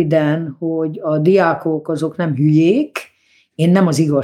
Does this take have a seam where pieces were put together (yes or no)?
no